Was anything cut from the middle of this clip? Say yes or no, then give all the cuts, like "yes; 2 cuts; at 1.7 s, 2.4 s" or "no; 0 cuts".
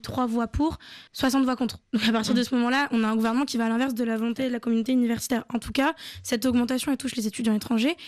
yes; 1 cut; at 1.1 s